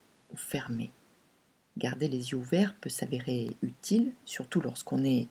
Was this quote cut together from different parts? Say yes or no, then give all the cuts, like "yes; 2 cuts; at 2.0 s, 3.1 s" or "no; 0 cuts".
no; 0 cuts